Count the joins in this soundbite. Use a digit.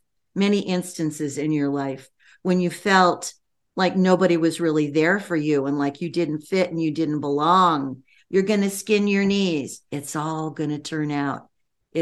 2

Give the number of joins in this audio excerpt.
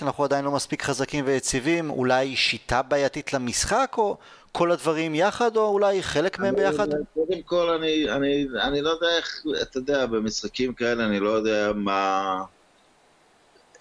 0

